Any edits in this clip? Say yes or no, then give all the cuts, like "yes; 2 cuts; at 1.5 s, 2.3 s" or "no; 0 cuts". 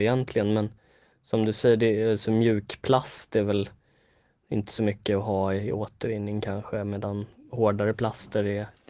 no; 0 cuts